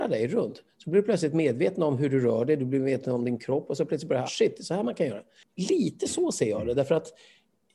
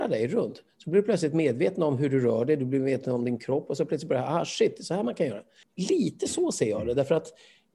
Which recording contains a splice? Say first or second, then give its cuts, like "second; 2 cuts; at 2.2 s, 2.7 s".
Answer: first; 1 cut; at 4.3 s